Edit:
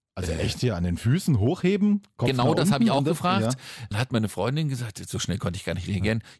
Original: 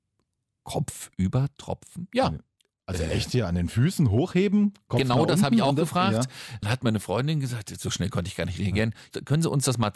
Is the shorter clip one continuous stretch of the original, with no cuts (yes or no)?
yes